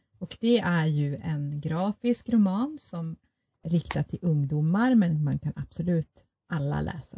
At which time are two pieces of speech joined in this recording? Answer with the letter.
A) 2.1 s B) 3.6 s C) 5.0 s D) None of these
B